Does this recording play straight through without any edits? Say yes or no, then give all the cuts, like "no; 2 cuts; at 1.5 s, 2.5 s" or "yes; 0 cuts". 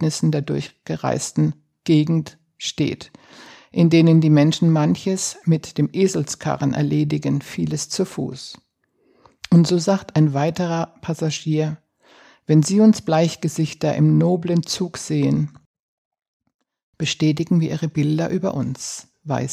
yes; 0 cuts